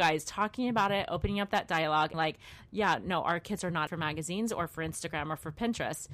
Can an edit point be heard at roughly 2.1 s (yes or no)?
yes